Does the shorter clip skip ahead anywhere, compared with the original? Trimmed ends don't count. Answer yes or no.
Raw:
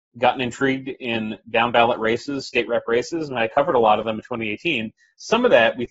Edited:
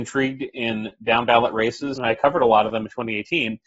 yes